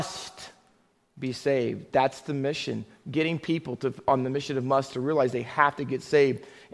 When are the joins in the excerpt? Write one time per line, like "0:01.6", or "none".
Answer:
none